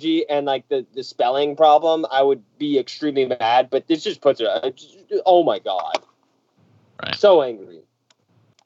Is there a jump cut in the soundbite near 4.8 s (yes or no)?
no